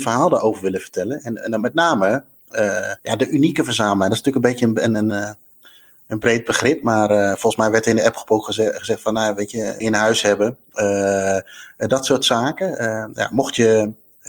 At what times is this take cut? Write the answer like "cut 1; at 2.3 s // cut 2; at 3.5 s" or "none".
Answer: cut 1; at 3.0 s // cut 2; at 5.1 s // cut 3; at 9.8 s